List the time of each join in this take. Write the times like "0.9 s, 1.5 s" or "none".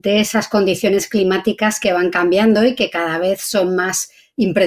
none